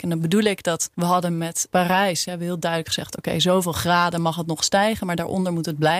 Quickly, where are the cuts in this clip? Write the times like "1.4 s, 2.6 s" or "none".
none